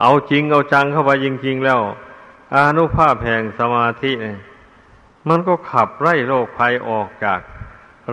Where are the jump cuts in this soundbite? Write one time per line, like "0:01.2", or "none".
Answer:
none